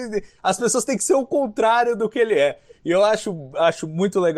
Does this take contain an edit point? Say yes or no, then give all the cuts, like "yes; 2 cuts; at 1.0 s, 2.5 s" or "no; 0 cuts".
no; 0 cuts